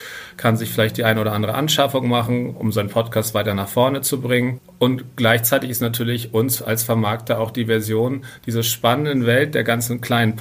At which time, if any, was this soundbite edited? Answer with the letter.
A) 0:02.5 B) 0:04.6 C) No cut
C